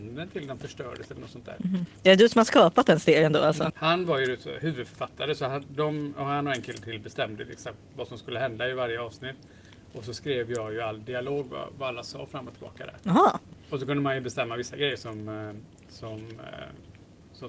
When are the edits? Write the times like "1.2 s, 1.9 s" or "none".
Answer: 3.7 s